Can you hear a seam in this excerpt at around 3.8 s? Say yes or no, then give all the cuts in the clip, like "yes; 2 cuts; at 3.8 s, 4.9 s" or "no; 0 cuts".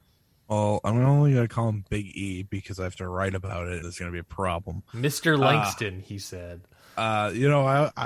yes; 1 cut; at 3.8 s